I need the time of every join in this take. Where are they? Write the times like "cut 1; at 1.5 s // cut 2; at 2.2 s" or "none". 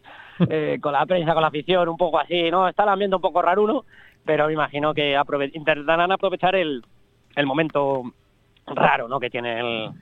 none